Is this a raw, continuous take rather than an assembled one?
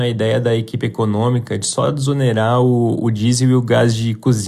yes; 0 cuts

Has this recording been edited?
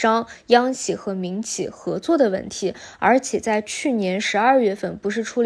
no; 0 cuts

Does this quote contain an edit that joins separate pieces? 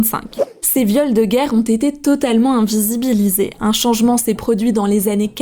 no; 0 cuts

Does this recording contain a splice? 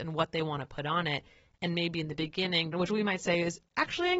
yes; 1 cut; at 2.7 s

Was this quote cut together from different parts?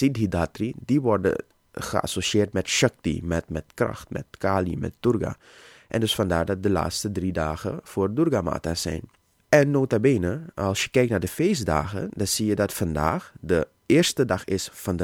no; 0 cuts

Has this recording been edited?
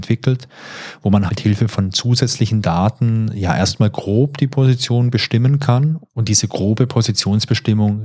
yes; 1 cut; at 1.3 s

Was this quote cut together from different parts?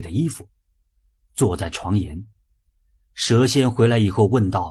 no; 0 cuts

